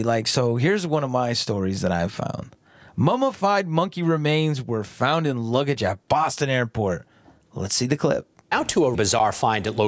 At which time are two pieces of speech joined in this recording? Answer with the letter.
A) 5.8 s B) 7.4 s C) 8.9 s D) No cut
C